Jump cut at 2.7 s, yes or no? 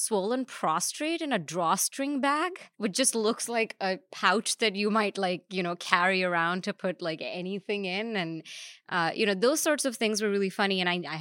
yes